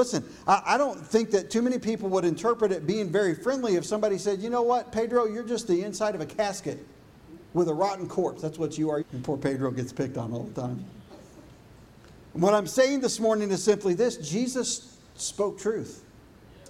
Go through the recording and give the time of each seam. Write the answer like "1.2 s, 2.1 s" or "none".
9.0 s